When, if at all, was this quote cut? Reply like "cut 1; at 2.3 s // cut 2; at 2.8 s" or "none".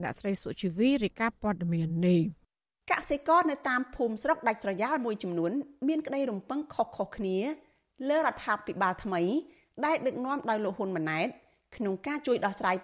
none

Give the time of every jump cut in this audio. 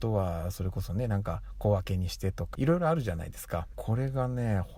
cut 1; at 2.5 s // cut 2; at 3.7 s

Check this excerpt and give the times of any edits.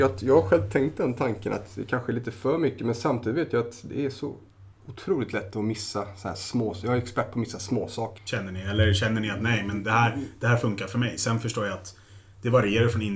cut 1; at 8.2 s

